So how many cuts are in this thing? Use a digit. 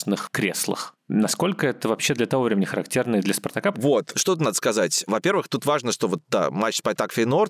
2